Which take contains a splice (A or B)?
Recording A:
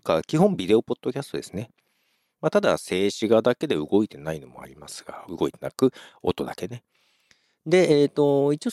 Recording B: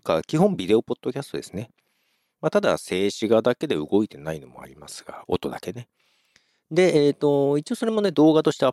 B